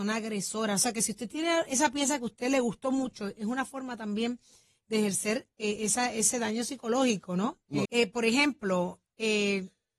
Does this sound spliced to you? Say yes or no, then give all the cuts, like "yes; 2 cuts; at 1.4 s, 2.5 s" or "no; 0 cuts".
yes; 1 cut; at 7.9 s